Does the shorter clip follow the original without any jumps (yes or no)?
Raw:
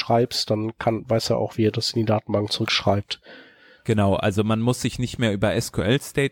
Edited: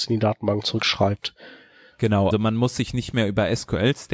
no